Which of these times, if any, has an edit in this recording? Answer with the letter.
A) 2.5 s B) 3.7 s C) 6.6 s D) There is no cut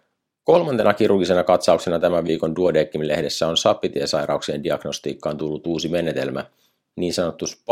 D